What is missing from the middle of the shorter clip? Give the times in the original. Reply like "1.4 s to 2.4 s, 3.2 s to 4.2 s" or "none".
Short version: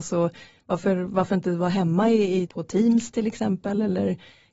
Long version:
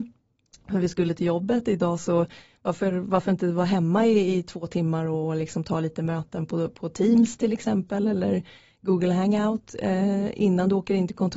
4.4 s to 6.7 s